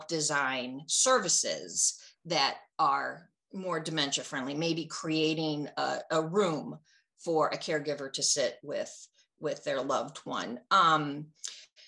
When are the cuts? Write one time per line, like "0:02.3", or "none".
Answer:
none